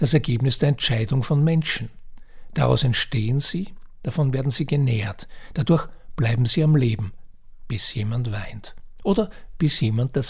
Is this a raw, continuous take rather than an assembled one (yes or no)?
yes